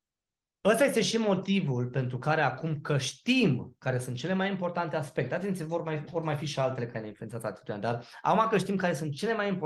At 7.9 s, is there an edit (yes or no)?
no